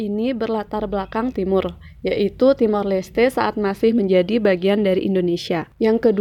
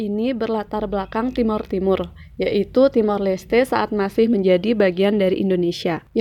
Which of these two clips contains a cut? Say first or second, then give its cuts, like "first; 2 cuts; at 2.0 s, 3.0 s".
first; 1 cut; at 1.3 s